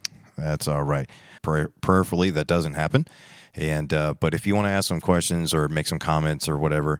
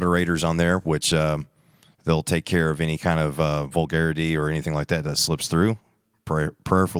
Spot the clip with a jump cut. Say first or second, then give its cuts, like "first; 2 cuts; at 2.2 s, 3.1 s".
first; 1 cut; at 1.4 s